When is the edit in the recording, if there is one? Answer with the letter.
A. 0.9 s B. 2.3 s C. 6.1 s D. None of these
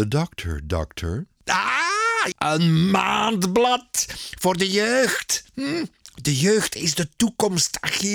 B